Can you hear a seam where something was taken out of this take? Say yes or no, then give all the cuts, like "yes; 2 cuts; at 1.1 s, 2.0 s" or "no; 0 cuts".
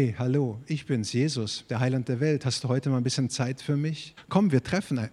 yes; 1 cut; at 4.2 s